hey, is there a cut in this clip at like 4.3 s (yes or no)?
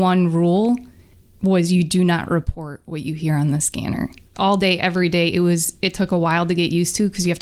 yes